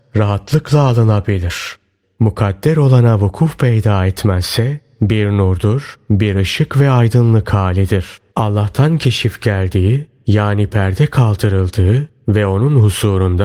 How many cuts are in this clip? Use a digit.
2